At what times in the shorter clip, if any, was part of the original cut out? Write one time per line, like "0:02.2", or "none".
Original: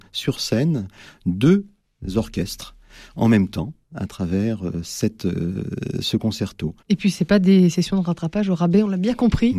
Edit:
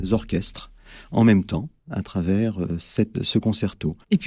0:03.1